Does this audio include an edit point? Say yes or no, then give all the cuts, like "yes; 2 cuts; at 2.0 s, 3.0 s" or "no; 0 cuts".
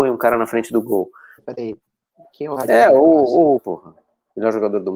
yes; 2 cuts; at 1.4 s, 3.6 s